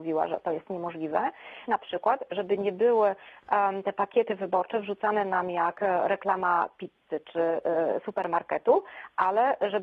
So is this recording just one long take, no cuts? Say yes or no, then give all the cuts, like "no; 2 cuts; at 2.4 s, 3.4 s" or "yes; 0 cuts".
no; 1 cut; at 1.7 s